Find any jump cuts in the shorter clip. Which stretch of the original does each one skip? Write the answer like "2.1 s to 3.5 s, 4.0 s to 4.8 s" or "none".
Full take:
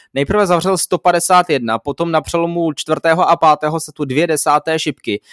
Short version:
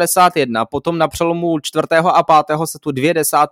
none